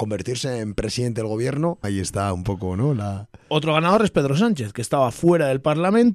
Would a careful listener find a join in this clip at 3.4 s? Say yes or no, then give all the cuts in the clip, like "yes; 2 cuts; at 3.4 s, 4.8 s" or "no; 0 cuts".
no; 1 cut; at 1.8 s